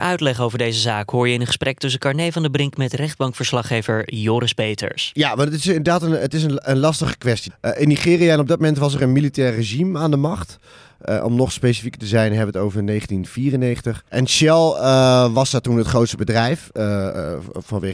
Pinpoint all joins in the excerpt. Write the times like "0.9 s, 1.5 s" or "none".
7.5 s, 14.1 s